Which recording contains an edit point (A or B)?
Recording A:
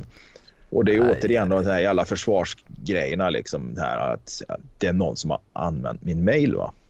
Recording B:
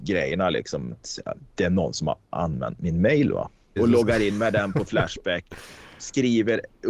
B